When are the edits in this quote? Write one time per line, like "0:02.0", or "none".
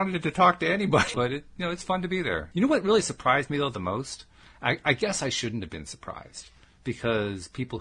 0:01.1
0:02.5